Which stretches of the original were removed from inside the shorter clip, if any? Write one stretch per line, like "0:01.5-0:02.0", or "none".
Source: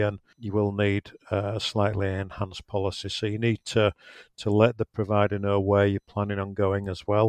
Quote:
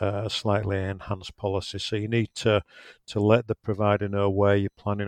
none